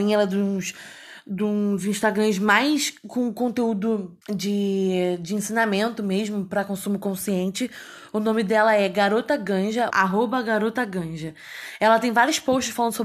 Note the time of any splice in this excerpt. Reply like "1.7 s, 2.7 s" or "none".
4.2 s, 9.9 s